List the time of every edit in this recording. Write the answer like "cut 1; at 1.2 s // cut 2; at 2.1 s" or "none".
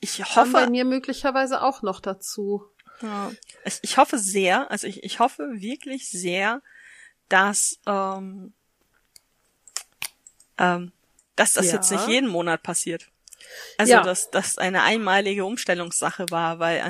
cut 1; at 11.2 s